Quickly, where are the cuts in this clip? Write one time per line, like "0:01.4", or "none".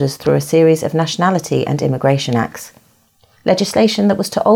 none